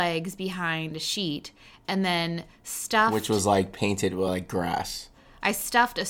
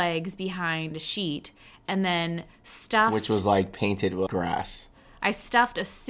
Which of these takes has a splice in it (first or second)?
second